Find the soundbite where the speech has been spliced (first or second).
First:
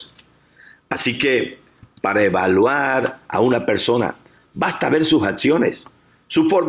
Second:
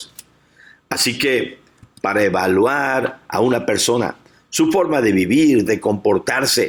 second